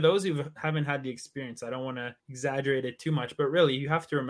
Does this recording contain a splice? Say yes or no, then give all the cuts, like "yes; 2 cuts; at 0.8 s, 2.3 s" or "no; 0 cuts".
yes; 1 cut; at 2.2 s